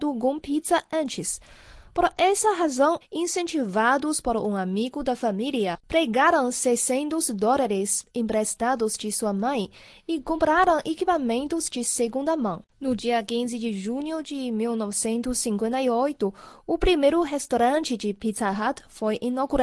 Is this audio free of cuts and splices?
no; 2 cuts; at 3.0 s, 12.7 s

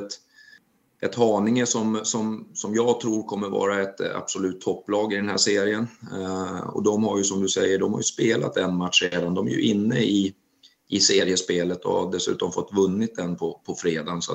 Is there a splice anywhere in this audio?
no; 0 cuts

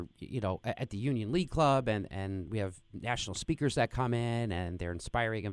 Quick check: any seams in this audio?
no; 0 cuts

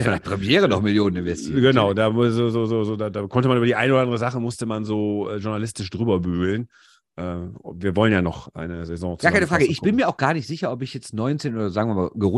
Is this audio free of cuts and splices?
yes; 0 cuts

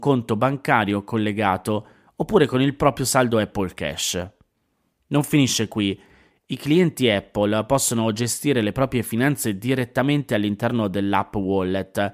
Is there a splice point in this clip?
no; 0 cuts

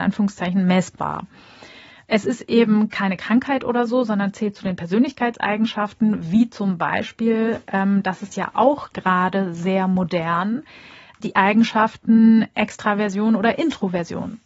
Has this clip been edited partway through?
no; 0 cuts

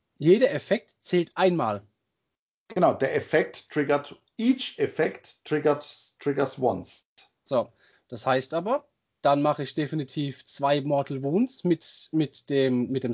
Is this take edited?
no; 0 cuts

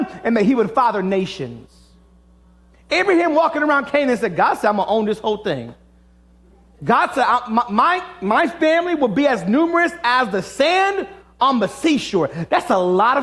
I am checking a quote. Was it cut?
no; 0 cuts

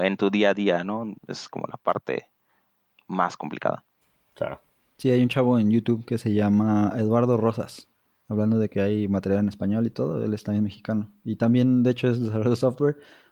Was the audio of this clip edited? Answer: yes; 1 cut; at 1.2 s

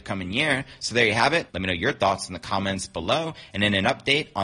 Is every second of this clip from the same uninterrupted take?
no; 1 cut; at 1.5 s

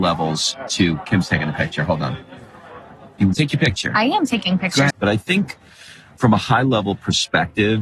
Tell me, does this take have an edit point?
yes; 2 cuts; at 3.3 s, 4.9 s

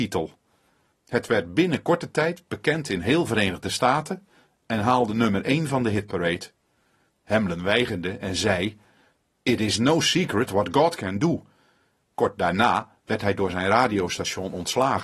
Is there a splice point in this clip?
yes; 3 cuts; at 0.9 s, 7.1 s, 12.1 s

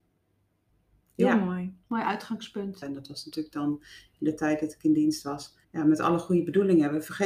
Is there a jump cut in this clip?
yes; 2 cuts; at 2.8 s, 5.6 s

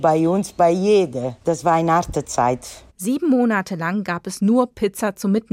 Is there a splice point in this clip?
yes; 1 cut; at 1.4 s

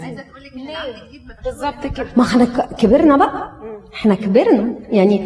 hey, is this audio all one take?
no; 1 cut; at 1.4 s

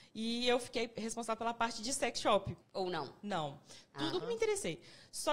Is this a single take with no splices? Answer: no; 2 cuts; at 2.6 s, 4.2 s

